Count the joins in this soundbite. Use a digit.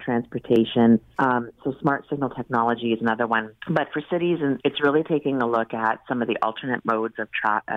3